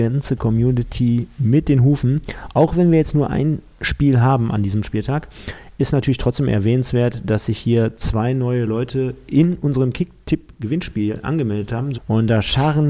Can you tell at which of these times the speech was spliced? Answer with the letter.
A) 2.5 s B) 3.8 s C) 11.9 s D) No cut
C